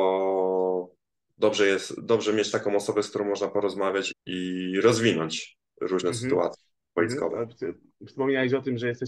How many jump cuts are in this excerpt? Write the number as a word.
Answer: one